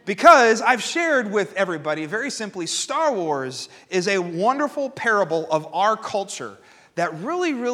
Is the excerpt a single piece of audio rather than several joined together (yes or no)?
yes